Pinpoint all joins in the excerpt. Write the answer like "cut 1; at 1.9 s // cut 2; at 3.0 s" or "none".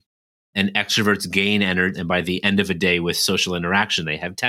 cut 1; at 1.9 s